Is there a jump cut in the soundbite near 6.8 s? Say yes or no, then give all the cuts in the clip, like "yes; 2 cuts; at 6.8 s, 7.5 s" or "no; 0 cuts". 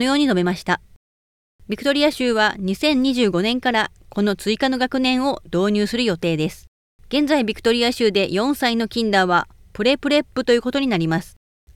no; 0 cuts